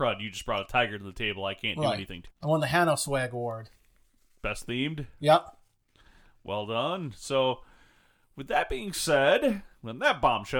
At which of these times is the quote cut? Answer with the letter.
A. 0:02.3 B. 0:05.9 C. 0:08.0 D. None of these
A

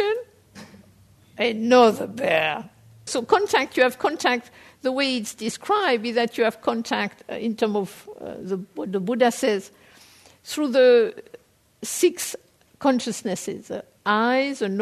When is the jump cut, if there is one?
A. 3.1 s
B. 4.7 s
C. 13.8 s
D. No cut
A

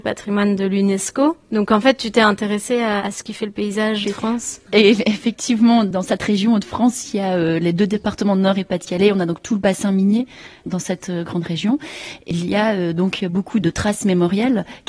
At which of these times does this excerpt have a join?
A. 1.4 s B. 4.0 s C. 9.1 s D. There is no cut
B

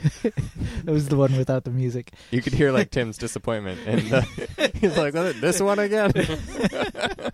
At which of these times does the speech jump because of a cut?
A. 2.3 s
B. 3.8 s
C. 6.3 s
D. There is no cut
D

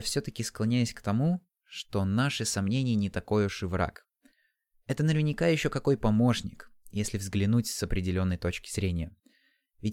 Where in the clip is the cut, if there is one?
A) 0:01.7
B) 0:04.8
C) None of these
C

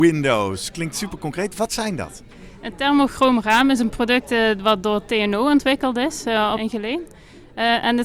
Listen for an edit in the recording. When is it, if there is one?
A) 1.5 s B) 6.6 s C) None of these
B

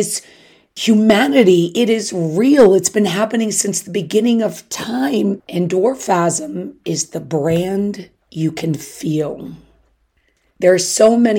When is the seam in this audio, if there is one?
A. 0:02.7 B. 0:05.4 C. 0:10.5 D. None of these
B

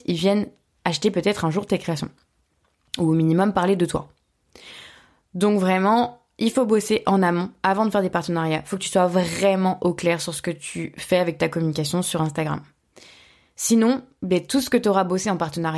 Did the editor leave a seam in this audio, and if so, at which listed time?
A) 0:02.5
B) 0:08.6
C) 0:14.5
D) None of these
D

